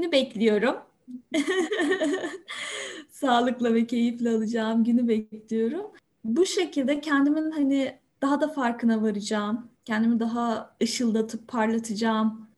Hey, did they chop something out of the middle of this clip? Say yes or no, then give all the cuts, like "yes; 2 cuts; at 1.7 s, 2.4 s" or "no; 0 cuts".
no; 0 cuts